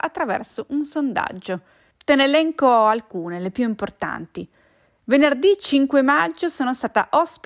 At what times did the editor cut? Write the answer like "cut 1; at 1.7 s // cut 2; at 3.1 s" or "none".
cut 1; at 1.9 s